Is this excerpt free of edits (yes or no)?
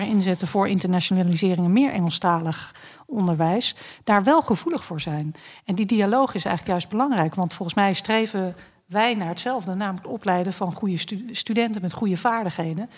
yes